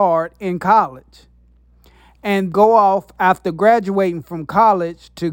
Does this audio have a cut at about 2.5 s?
yes; 1 cut; at 2.5 s

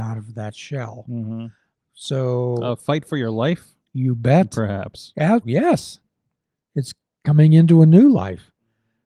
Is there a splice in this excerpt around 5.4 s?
yes; 1 cut; at 5.4 s

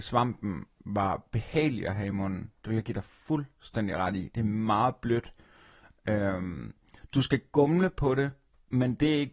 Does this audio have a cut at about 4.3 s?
no; 0 cuts

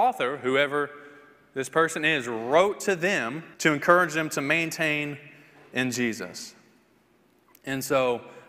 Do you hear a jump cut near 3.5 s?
yes; 1 cut; at 3.5 s

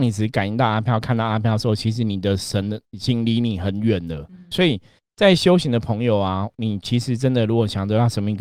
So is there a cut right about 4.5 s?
yes; 1 cut; at 4.5 s

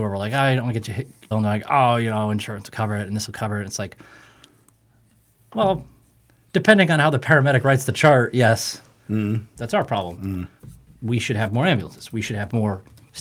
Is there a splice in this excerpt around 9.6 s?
yes; 2 cuts; at 1.3 s, 9.6 s

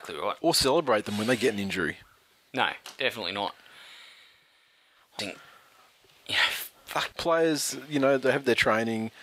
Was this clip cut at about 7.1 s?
yes; 2 cuts; at 5.2 s, 7.1 s

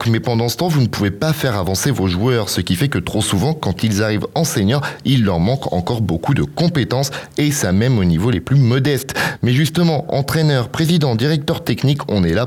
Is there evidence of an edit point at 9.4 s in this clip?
no; 0 cuts

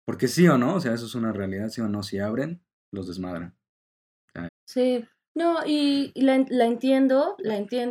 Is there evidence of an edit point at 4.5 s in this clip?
yes; 1 cut; at 4.5 s

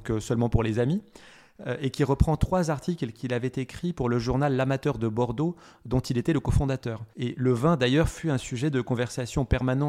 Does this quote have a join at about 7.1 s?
yes; 1 cut; at 7.1 s

